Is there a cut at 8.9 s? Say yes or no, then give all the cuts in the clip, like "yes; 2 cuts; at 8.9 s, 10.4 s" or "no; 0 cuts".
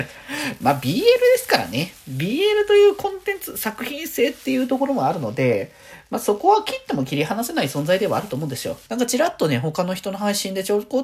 yes; 1 cut; at 8.9 s